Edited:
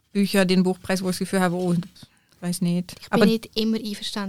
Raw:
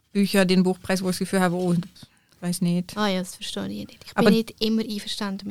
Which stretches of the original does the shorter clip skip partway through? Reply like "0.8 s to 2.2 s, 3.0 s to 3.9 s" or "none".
2.9 s to 4.0 s